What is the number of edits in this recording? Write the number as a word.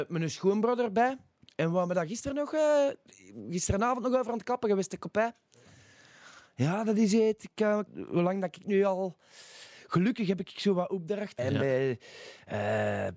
two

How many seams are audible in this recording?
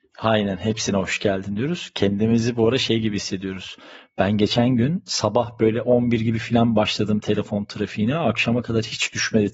zero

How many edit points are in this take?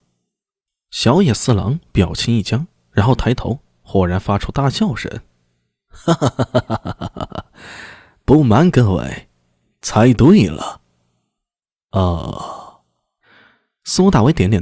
zero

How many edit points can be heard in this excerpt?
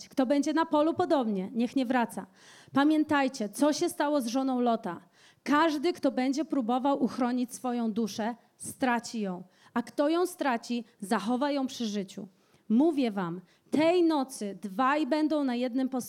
zero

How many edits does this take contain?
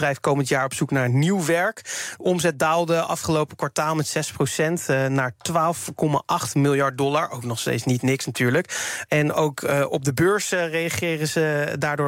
one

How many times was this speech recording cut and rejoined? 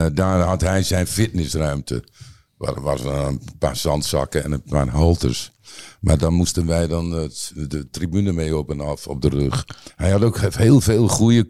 one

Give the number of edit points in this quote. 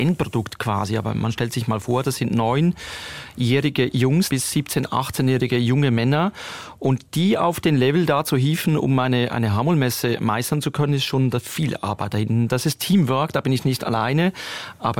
one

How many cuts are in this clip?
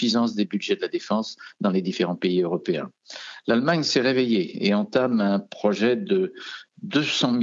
zero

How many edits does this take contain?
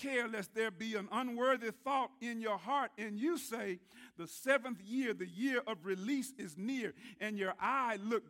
zero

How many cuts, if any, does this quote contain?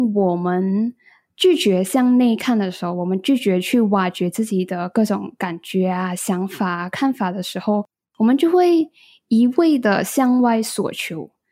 zero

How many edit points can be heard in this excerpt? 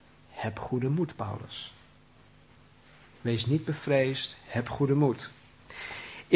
zero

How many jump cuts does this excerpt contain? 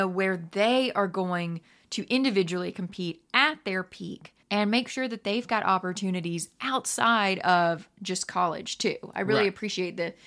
one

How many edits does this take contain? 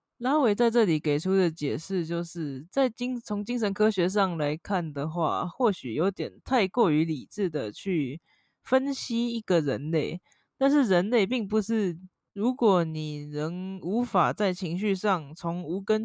one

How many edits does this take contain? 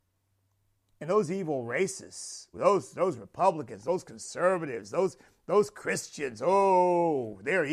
one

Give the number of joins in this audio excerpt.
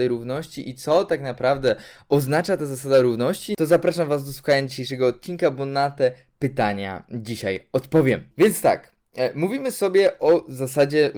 one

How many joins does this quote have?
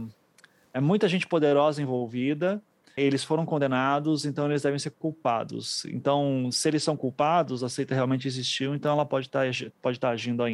one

